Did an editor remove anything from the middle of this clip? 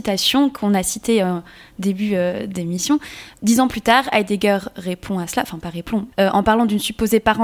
yes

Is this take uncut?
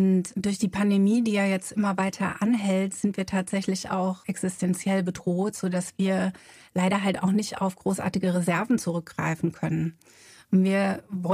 yes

